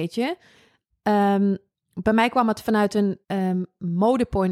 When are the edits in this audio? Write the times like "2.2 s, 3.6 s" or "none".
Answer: 3.2 s